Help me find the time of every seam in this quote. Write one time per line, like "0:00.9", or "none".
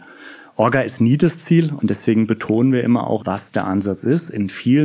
0:01.8
0:03.2

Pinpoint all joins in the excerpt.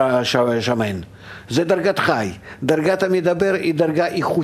none

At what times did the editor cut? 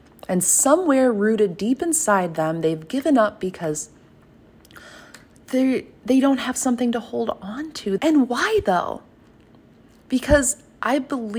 0:08.0

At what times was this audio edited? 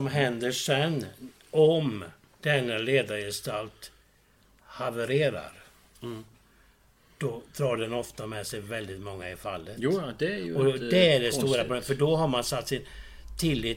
none

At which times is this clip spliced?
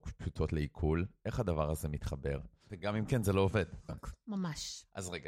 0:02.7
0:03.9

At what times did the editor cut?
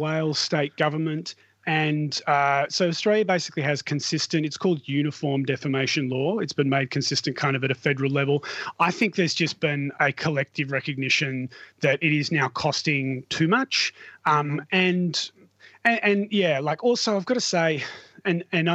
none

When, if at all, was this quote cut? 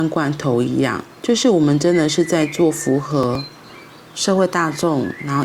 0:01.1

